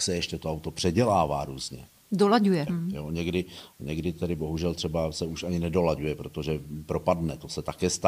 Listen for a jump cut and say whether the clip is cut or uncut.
cut